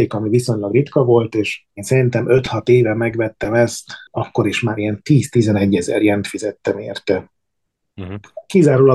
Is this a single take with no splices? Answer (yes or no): no